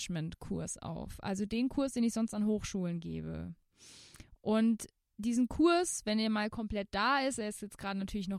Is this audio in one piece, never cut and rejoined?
yes; 0 cuts

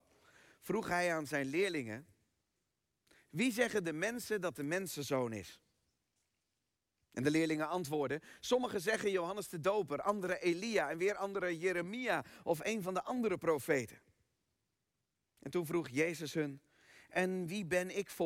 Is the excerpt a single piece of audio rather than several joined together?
yes; 0 cuts

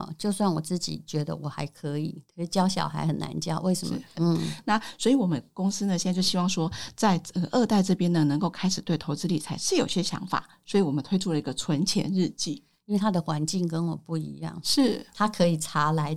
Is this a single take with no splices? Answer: no; 2 cuts; at 4.1 s, 12.7 s

